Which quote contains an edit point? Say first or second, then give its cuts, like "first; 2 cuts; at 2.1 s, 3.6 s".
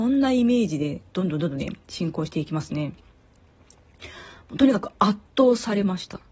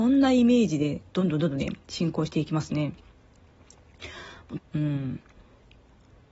second; 1 cut; at 4.6 s